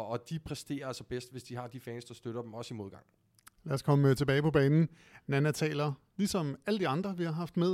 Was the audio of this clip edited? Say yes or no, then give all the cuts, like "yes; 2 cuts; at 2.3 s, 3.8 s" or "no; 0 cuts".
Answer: no; 0 cuts